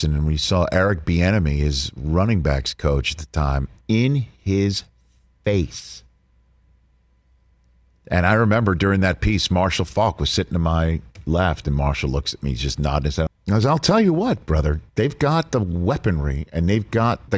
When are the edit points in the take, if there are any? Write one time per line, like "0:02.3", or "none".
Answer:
0:13.3